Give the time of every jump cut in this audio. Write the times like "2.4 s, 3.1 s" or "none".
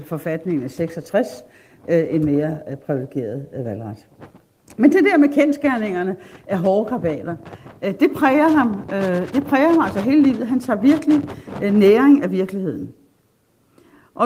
none